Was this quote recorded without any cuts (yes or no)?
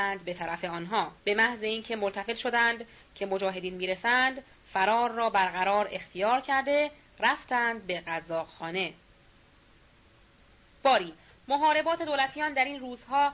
no